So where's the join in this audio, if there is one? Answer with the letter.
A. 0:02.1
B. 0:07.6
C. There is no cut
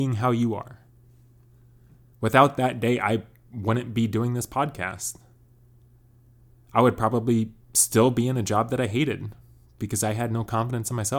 A